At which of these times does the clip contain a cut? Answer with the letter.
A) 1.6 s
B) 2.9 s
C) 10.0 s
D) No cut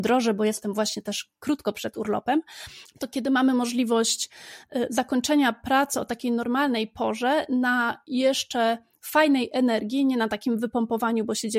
B